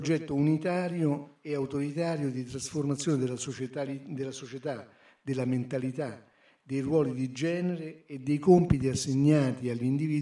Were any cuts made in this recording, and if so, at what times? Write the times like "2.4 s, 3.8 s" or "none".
none